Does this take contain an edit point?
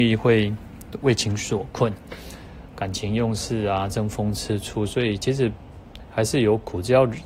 yes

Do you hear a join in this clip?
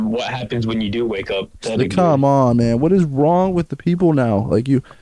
yes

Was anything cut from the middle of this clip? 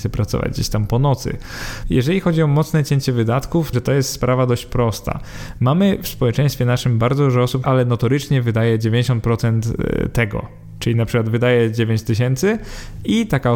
yes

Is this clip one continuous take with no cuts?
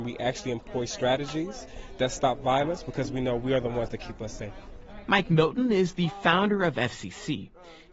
yes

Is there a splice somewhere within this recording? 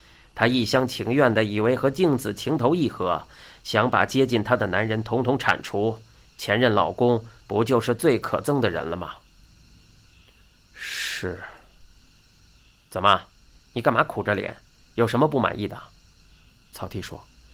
no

